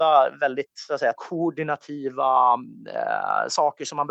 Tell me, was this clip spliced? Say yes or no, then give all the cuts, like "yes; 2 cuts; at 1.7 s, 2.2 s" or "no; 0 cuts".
yes; 1 cut; at 1.1 s